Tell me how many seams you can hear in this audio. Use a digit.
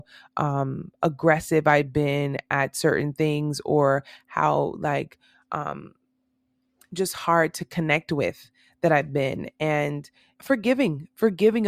1